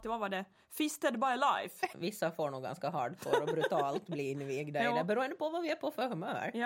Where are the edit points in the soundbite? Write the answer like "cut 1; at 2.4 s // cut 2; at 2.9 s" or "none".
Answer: cut 1; at 1.9 s